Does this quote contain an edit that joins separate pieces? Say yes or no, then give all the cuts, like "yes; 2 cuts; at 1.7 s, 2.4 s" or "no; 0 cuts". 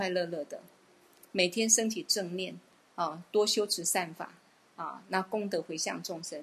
no; 0 cuts